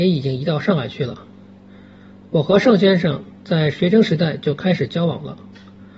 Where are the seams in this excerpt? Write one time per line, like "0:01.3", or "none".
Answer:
none